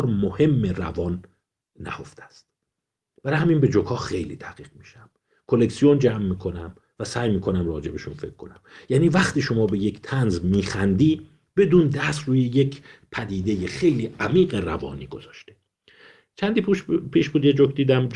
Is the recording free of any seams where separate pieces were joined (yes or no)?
yes